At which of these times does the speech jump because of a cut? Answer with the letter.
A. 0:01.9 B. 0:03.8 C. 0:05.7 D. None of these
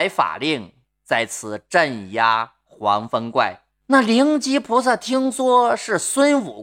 B